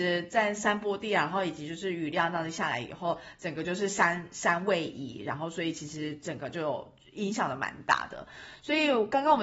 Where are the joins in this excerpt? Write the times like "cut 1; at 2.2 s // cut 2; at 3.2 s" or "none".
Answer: none